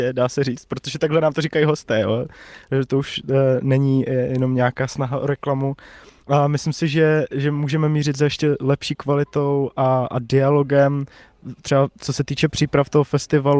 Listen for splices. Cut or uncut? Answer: uncut